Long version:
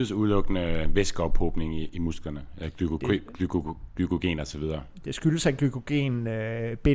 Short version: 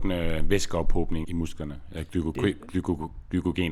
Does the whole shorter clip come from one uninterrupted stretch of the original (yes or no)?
no